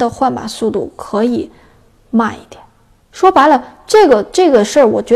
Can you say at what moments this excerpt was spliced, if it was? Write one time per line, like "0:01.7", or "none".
0:03.0

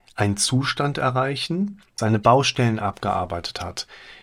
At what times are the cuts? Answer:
0:02.0

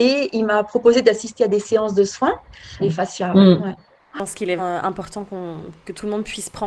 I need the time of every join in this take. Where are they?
0:02.8
0:04.6

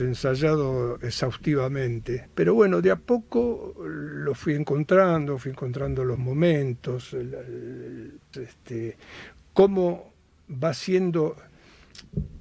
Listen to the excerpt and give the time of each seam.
0:02.3
0:08.3

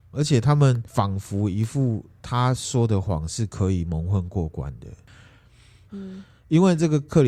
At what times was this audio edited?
0:05.9

